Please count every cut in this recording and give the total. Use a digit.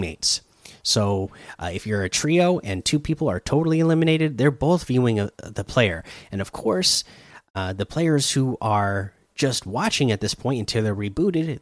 0